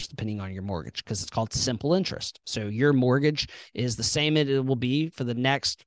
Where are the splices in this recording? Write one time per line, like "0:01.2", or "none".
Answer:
none